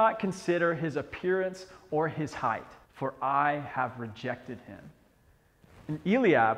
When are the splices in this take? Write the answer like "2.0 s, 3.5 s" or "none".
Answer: 2.8 s